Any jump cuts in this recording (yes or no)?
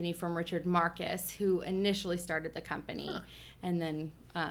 no